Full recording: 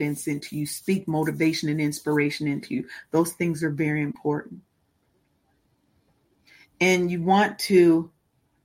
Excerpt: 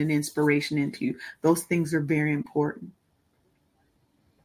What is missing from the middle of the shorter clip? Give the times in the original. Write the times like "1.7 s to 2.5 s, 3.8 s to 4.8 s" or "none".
none